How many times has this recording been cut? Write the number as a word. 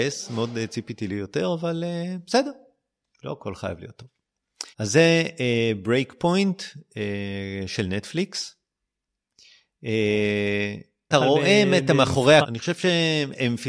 three